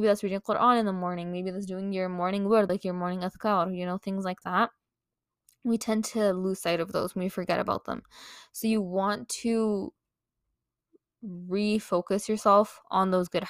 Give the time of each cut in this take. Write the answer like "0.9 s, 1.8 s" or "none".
none